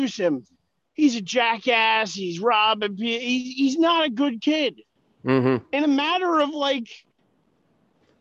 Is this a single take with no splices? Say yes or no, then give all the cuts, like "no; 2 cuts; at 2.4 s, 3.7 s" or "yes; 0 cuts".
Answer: yes; 0 cuts